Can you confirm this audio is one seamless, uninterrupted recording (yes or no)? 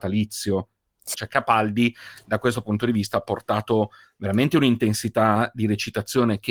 no